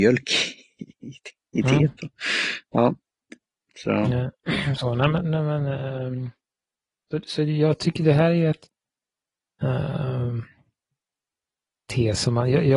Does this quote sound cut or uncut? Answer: uncut